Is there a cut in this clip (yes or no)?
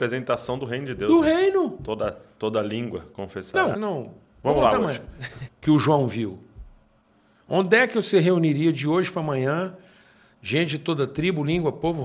yes